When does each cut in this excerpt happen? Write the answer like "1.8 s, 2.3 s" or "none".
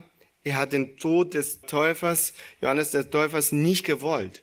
1.6 s